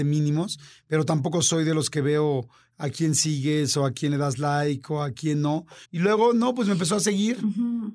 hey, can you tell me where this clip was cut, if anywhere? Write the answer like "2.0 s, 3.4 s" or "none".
5.8 s